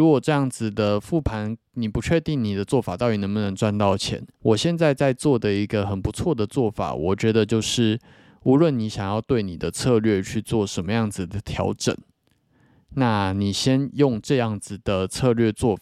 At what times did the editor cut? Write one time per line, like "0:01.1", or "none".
0:04.3